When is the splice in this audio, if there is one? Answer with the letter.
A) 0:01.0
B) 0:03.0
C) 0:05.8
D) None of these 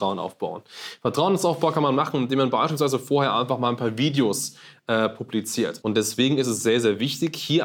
C